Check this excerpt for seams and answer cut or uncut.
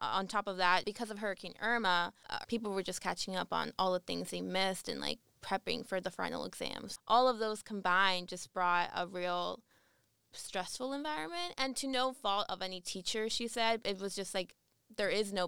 cut